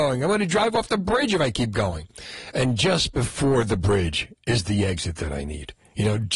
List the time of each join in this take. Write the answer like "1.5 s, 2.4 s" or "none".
none